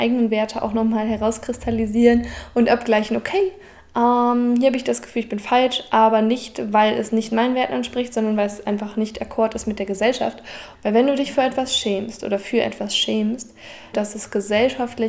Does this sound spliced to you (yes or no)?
yes